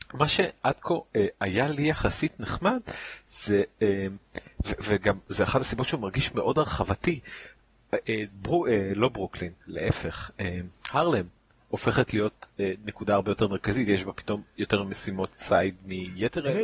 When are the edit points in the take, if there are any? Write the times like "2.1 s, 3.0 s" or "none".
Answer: none